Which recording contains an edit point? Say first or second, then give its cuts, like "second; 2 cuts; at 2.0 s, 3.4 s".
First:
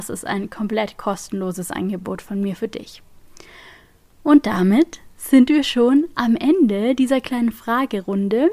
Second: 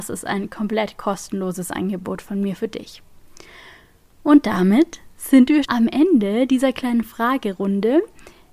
second; 1 cut; at 5.6 s